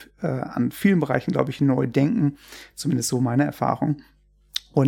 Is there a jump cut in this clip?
no; 0 cuts

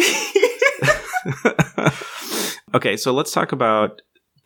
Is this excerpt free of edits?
yes; 0 cuts

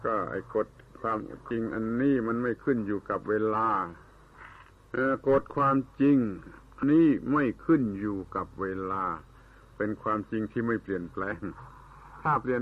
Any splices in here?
yes; 1 cut; at 6.8 s

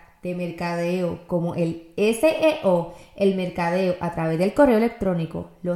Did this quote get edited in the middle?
no; 0 cuts

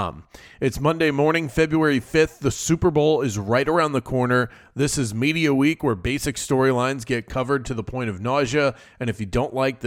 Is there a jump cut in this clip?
no; 0 cuts

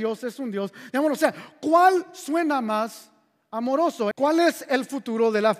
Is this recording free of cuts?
no; 1 cut; at 4.1 s

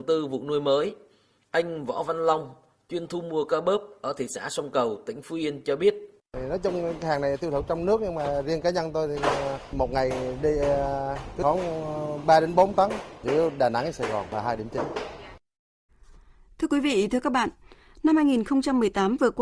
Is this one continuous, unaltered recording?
yes; 0 cuts

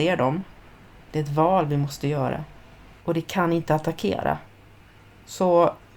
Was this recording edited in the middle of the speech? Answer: yes; 2 cuts; at 0.9 s, 3.0 s

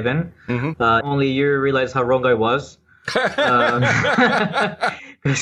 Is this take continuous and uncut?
no; 1 cut; at 1.0 s

